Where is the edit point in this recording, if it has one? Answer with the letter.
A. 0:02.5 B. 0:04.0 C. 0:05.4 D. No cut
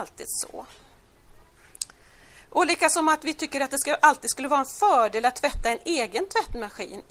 D